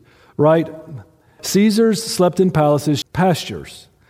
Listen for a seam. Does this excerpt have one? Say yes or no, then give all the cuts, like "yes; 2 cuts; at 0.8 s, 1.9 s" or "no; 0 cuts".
yes; 2 cuts; at 1.4 s, 3.0 s